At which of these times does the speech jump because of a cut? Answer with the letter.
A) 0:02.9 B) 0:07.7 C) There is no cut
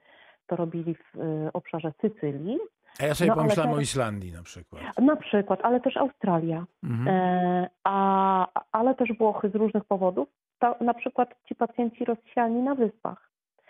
C